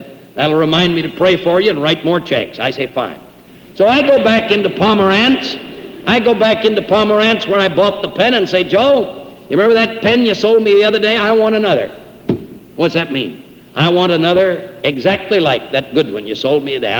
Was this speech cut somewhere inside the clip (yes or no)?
no